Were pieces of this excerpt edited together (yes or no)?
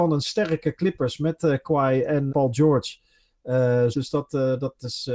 yes